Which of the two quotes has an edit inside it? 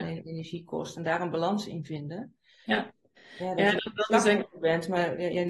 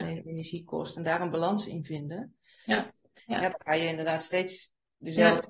second; 1 cut; at 3.2 s

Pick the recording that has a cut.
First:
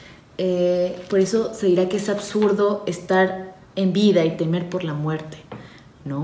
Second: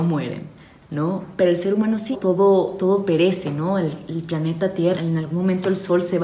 second; 2 cuts; at 2.1 s, 4.9 s

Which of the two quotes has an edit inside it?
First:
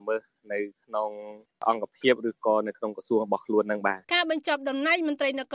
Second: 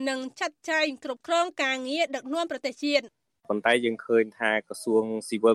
first; 1 cut; at 4.0 s

